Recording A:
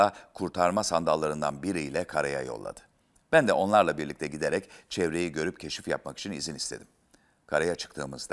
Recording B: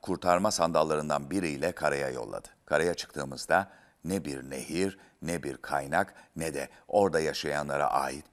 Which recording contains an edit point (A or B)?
B